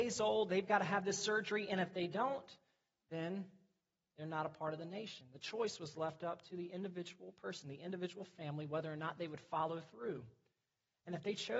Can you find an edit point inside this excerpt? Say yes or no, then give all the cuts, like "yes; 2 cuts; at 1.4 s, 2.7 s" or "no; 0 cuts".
no; 0 cuts